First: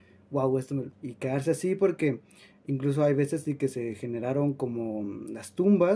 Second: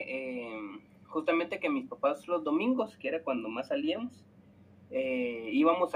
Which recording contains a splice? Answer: first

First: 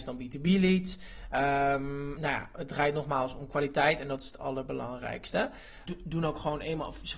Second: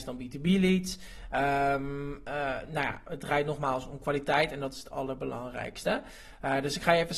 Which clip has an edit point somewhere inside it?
first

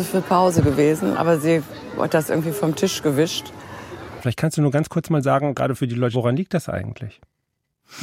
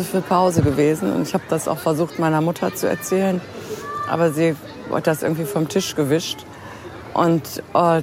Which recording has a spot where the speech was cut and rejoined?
first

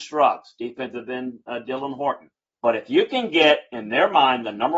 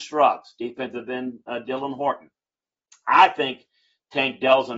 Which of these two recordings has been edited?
first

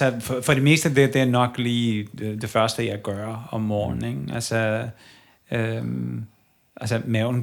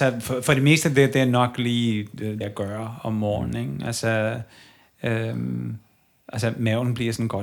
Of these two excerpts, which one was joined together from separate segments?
second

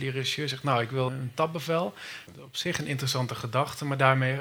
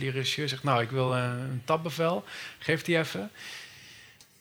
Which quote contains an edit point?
first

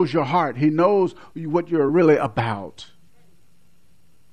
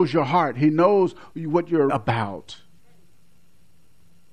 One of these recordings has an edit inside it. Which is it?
second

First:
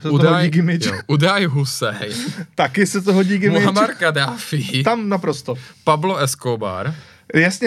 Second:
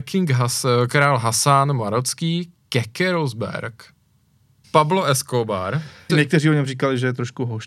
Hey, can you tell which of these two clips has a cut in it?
second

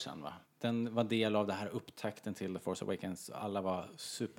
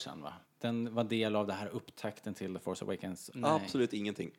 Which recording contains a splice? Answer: second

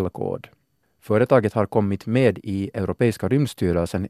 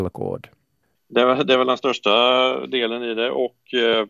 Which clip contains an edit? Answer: second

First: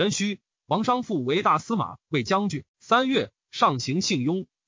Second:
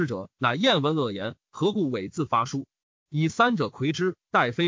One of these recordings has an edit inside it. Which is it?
first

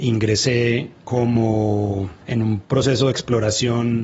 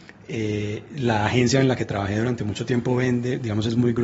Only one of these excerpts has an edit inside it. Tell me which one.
first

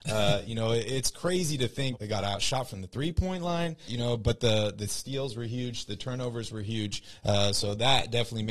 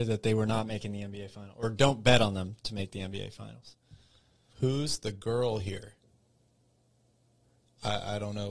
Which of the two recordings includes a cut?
first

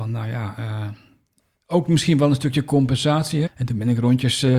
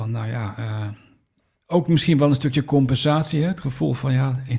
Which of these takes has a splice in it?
first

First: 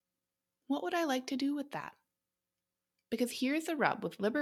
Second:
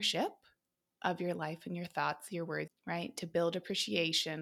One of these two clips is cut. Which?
second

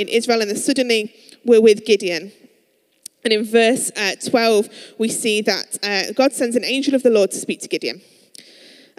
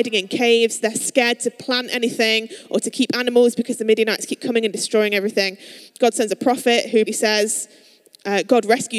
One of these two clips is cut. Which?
second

